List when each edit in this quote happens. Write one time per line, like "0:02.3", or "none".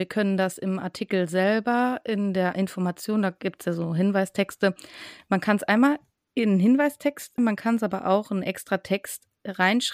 0:07.4